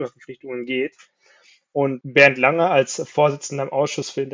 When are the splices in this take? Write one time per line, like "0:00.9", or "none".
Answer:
none